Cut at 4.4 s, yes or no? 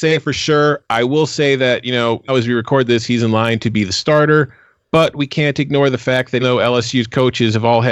no